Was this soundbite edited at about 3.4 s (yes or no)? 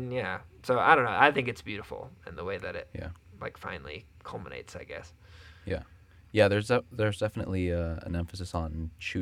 no